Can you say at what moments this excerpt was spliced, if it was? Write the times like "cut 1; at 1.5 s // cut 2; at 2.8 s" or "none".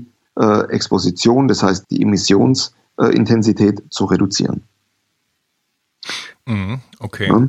cut 1; at 1.8 s